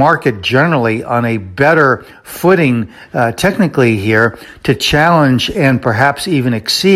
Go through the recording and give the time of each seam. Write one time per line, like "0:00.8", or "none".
none